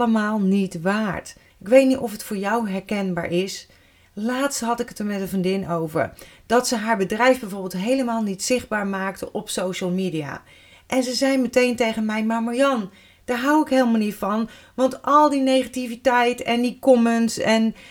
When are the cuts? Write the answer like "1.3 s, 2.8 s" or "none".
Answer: 1.5 s, 4.0 s